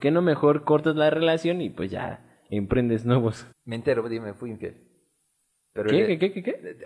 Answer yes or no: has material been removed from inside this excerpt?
yes